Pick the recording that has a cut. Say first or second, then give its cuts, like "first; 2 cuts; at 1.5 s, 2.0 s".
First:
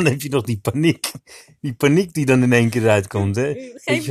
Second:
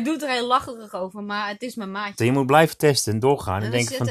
second; 1 cut; at 2.2 s